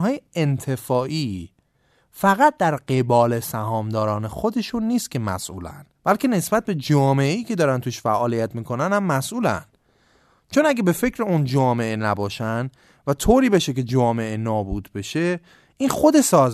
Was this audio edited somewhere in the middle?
yes; 1 cut; at 6.0 s

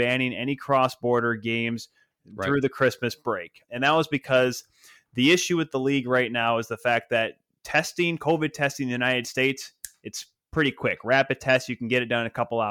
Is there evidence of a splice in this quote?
no; 0 cuts

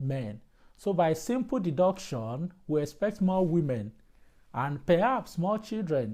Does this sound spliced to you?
no; 0 cuts

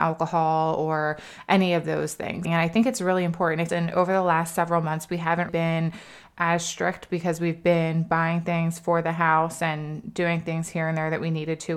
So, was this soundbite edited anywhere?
yes; 3 cuts; at 2.4 s, 3.7 s, 5.5 s

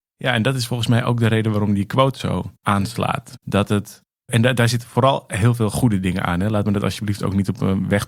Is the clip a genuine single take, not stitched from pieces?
no; 1 cut; at 3.4 s

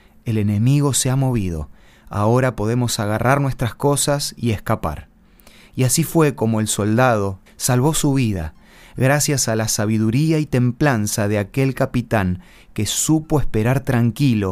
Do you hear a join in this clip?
yes; 1 cut; at 7.5 s

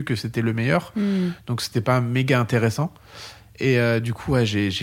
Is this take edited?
no; 0 cuts

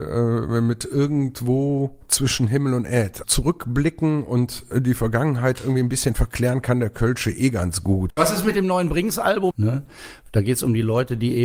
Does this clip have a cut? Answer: yes; 2 cuts; at 8.1 s, 9.5 s

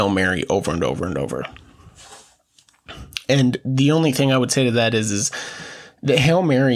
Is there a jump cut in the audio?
no; 0 cuts

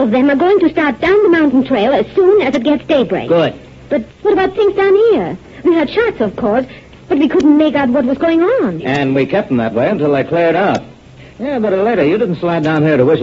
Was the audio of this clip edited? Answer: yes; 2 cuts; at 4.1 s, 8.8 s

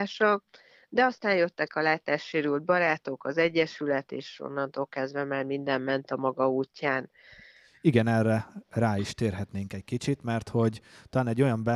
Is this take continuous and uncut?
yes; 0 cuts

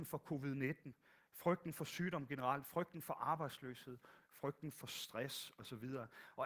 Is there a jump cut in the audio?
yes; 1 cut; at 4.2 s

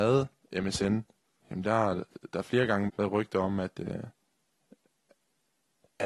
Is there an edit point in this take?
yes; 1 cut; at 2.9 s

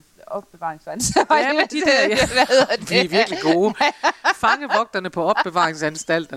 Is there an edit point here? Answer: no; 0 cuts

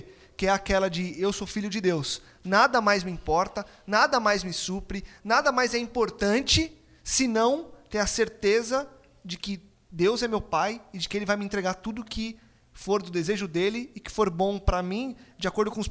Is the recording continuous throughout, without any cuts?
yes; 0 cuts

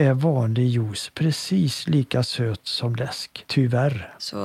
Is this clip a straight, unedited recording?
yes; 0 cuts

